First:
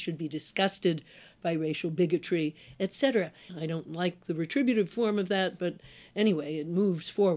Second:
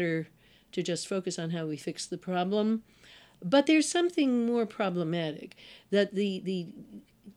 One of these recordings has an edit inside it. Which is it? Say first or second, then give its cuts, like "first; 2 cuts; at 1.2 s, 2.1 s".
first; 1 cut; at 3.5 s